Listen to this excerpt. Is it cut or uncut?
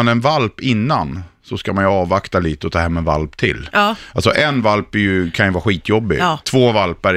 uncut